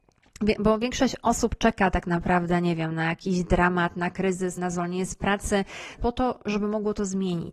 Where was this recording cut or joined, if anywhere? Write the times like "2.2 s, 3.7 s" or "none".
4.6 s, 6.0 s